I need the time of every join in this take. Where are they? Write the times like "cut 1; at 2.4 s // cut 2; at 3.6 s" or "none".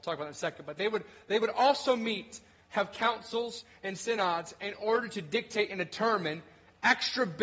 none